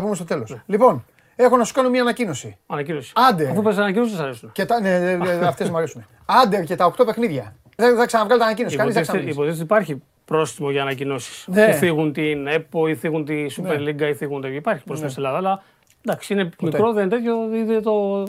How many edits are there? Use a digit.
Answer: 1